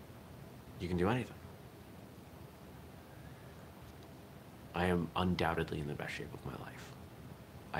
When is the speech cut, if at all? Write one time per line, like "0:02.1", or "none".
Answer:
0:04.7